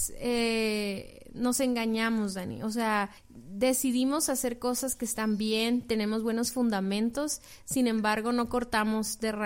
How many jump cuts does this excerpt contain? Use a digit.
1